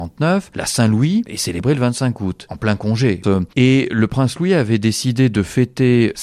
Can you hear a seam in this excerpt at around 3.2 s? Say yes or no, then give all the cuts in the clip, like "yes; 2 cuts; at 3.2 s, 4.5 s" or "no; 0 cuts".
yes; 1 cut; at 3.2 s